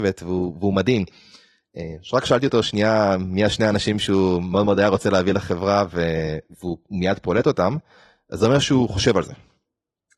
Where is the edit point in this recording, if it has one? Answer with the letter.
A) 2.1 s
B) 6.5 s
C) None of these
B